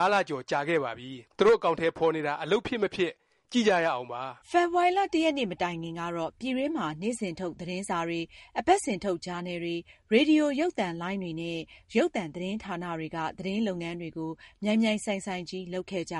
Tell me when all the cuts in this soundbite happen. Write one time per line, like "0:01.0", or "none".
0:01.3
0:04.4